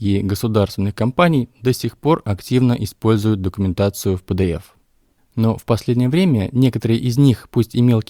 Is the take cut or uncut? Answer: uncut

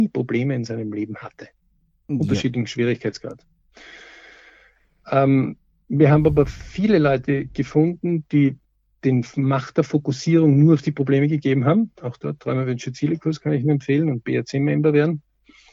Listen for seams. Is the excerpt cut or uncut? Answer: uncut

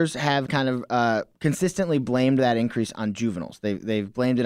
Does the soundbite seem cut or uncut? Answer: cut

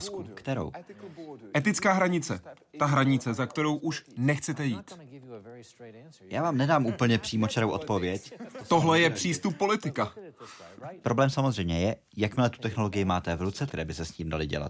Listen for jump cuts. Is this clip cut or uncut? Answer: cut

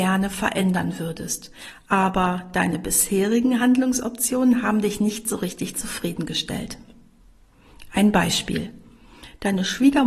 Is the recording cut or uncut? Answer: uncut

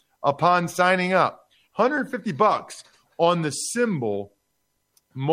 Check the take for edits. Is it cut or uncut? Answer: cut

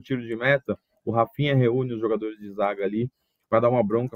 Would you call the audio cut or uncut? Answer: uncut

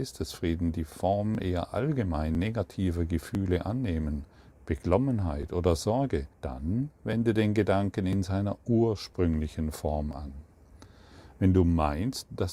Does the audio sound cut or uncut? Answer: cut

